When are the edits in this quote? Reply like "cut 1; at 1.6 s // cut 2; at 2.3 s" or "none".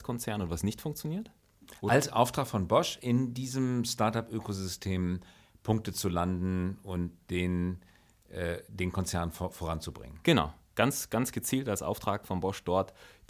cut 1; at 12.2 s